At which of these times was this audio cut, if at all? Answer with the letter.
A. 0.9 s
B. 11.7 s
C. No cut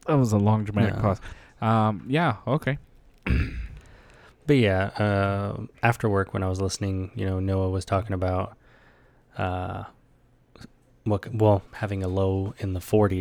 B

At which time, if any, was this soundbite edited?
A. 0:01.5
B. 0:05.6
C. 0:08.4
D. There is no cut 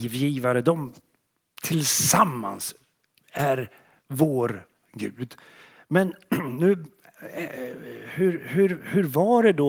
D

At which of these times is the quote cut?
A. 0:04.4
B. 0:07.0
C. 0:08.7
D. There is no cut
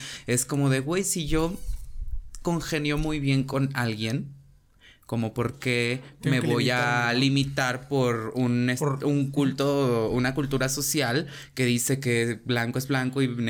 D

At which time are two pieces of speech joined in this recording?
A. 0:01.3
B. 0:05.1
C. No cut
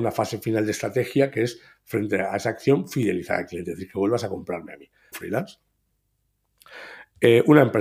B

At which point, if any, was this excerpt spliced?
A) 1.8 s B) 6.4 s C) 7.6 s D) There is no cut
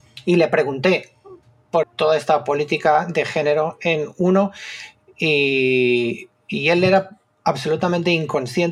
A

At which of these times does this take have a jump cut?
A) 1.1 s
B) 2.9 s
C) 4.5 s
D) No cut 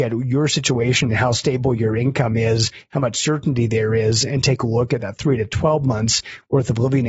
D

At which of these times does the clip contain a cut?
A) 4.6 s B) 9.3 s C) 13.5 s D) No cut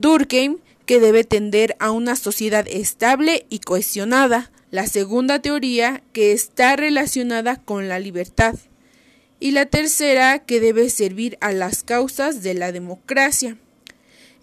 A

